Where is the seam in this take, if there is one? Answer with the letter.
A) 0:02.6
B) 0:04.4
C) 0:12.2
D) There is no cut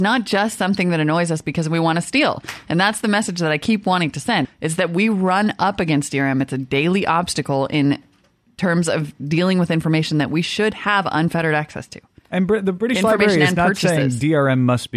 B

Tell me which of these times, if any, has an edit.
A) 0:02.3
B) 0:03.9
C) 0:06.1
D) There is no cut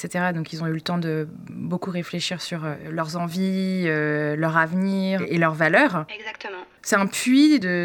C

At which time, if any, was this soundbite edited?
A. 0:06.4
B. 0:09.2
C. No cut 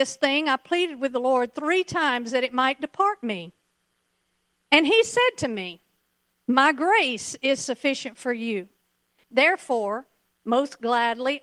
B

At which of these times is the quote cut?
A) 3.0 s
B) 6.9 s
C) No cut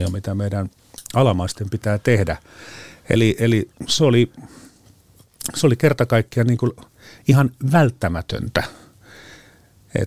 C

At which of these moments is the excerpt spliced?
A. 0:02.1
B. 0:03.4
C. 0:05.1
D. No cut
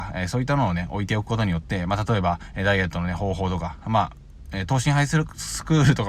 D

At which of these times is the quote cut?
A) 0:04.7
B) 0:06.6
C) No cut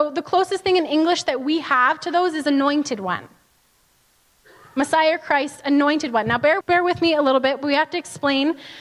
B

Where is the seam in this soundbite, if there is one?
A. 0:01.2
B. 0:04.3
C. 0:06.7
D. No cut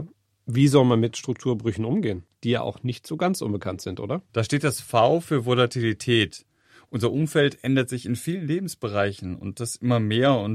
B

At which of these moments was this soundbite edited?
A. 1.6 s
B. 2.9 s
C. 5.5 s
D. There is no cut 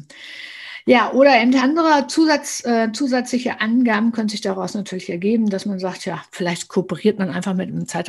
A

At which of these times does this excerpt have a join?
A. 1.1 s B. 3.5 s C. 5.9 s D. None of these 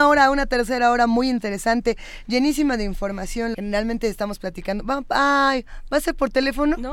B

